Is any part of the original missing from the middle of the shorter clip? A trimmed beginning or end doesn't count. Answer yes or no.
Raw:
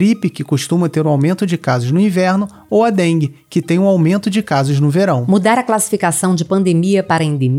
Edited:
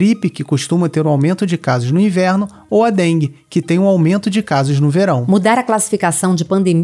no